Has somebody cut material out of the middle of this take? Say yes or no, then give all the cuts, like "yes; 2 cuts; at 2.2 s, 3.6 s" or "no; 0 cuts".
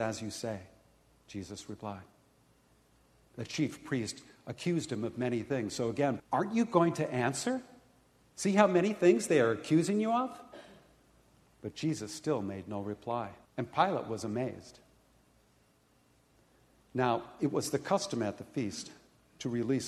yes; 2 cuts; at 6.2 s, 13.5 s